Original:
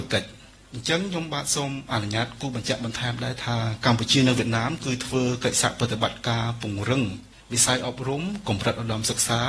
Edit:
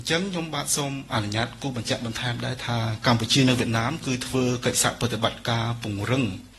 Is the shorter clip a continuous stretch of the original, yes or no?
yes